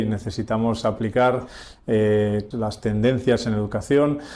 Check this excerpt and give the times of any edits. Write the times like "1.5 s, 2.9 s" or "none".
2.5 s